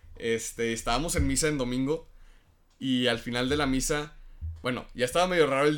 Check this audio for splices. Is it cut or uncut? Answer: uncut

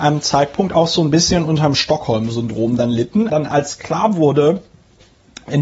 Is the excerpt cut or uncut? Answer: cut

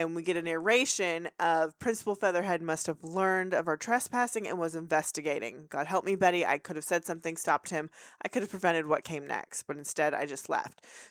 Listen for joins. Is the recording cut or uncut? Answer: uncut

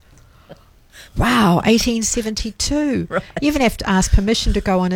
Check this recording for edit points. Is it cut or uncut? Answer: cut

